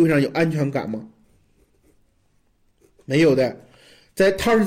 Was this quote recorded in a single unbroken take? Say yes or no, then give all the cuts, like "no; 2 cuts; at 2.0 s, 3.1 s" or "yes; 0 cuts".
yes; 0 cuts